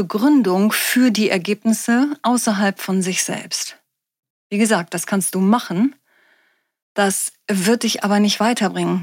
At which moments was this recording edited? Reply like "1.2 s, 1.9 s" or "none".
none